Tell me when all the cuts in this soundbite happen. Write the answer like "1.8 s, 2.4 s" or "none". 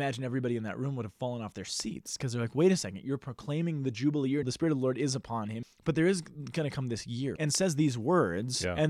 4.4 s, 5.6 s, 7.4 s